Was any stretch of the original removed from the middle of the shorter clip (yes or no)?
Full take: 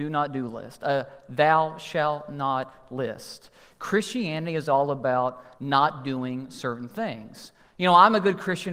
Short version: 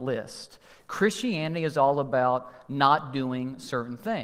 no